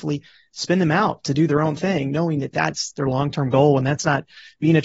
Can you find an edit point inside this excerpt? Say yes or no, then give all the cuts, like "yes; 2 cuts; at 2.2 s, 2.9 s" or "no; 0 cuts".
no; 0 cuts